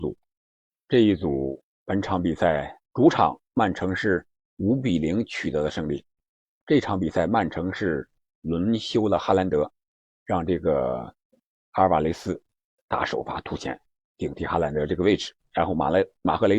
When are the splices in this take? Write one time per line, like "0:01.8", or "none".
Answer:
0:02.8